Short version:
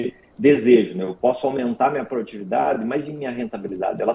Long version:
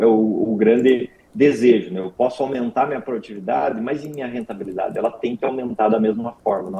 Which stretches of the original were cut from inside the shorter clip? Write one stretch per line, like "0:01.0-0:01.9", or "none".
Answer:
none